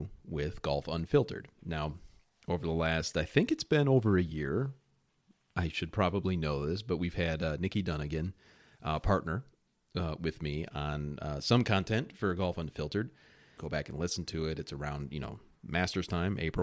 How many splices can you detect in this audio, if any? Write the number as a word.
one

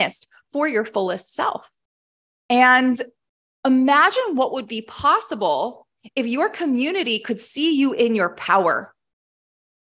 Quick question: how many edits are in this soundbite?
one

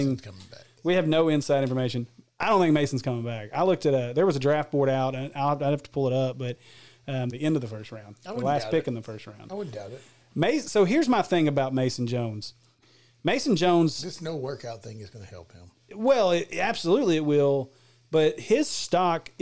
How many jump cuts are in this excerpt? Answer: one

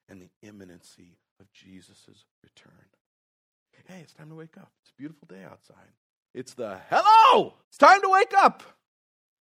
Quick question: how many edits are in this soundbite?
three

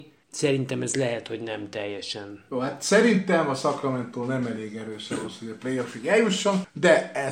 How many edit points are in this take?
zero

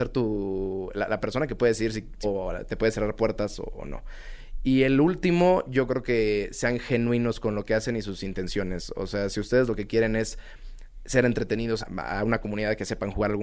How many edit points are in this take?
two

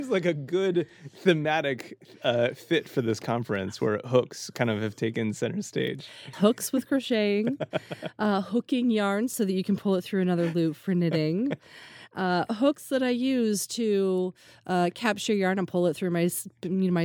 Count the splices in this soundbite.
one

